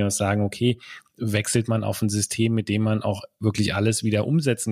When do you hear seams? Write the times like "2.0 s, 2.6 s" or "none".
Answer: none

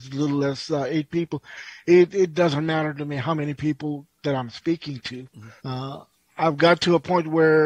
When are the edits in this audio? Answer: 5.6 s

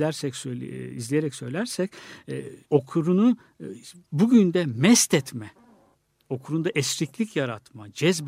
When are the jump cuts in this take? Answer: 2.6 s

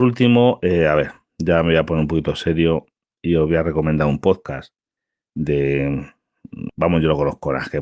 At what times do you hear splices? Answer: 6.7 s

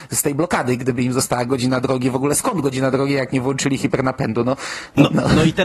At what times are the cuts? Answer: none

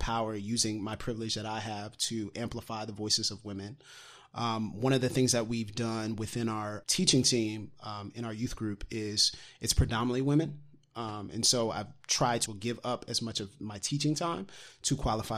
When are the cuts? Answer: 6.8 s, 12.5 s

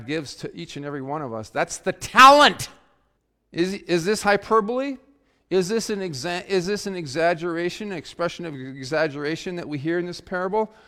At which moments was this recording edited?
none

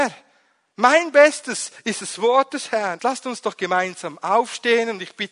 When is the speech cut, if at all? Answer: 3.0 s

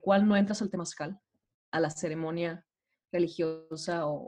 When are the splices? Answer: 1.5 s

